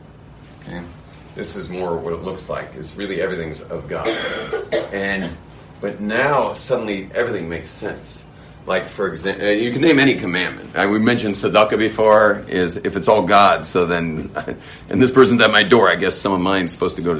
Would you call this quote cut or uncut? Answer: uncut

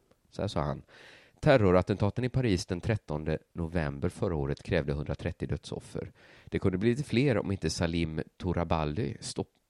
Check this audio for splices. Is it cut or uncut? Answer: uncut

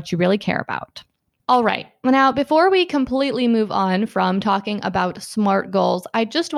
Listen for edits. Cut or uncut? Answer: uncut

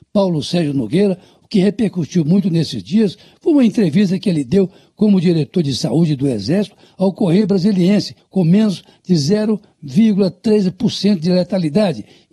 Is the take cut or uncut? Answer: cut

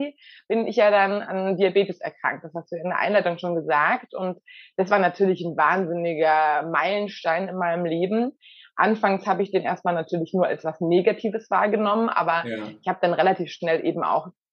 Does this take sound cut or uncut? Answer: uncut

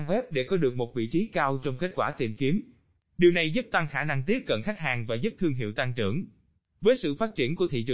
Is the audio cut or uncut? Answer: uncut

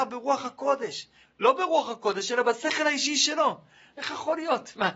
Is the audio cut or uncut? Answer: cut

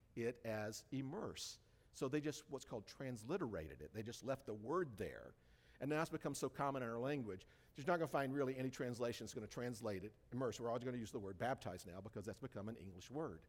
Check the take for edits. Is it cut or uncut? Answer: uncut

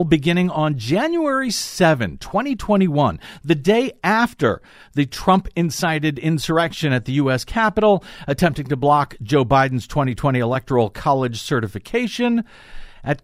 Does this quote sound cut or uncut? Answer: uncut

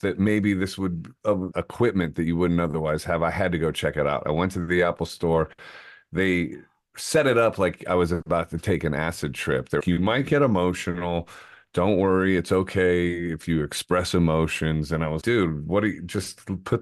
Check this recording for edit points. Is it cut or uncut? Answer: cut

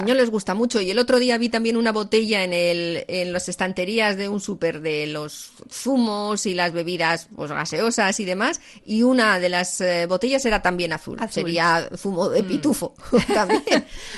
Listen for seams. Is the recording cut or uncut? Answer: uncut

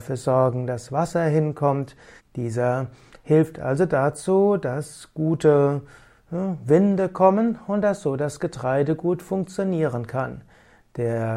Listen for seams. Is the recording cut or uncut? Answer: cut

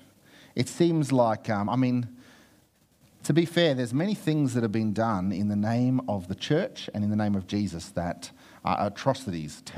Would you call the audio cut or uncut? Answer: uncut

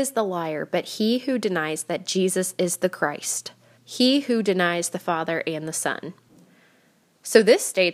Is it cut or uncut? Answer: cut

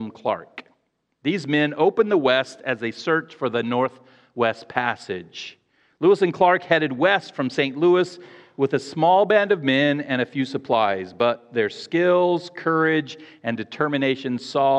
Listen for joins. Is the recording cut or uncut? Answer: uncut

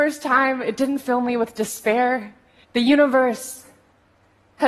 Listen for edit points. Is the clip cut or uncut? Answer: cut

